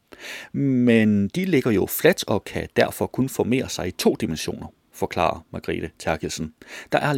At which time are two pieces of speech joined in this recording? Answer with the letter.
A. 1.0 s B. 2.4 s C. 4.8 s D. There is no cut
D